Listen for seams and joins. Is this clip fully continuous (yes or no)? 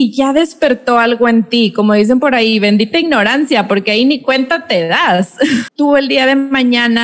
no